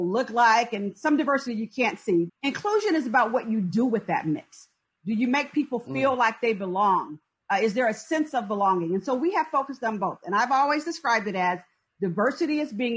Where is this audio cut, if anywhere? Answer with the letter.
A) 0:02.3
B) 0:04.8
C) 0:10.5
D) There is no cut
A